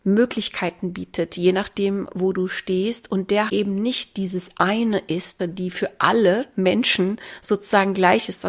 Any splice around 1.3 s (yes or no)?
no